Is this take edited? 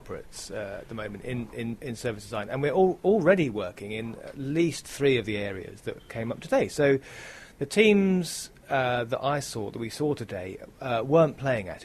no; 0 cuts

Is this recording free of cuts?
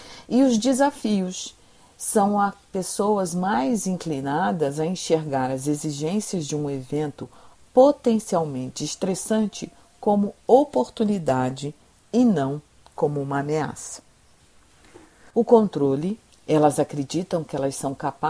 no; 1 cut; at 15.3 s

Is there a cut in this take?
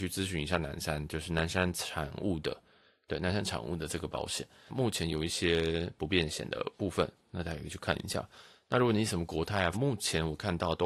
yes; 2 cuts; at 4.7 s, 9.7 s

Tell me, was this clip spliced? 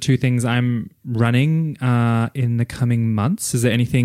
no; 0 cuts

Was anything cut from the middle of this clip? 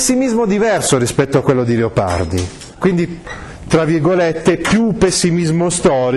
yes; 1 cut; at 2.7 s

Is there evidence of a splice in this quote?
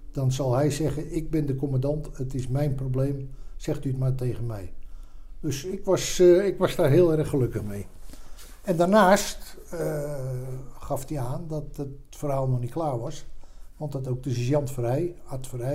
no; 0 cuts

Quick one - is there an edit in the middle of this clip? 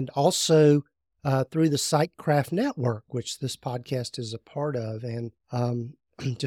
yes; 1 cut; at 5.4 s

